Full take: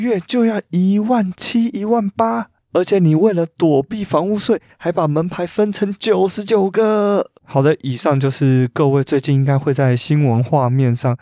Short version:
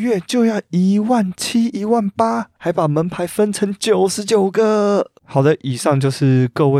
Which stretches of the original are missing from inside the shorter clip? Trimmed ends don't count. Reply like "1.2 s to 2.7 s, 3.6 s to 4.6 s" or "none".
2.6 s to 4.8 s